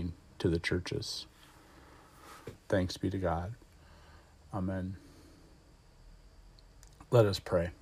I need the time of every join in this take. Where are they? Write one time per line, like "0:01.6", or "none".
0:02.5